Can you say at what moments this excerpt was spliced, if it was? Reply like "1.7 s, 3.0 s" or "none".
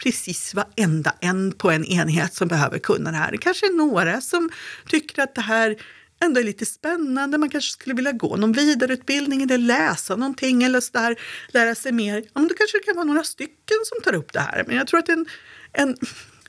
none